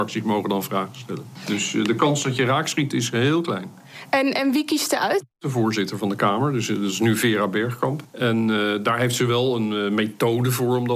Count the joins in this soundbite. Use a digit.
0